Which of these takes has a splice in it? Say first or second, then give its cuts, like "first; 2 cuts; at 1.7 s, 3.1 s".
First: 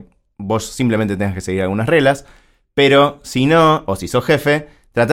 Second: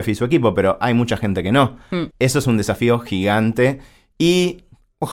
second; 1 cut; at 2.1 s